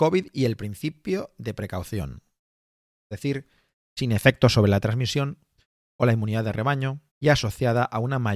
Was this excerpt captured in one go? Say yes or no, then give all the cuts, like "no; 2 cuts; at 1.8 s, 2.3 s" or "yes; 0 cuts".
no; 2 cuts; at 3.0 s, 7.1 s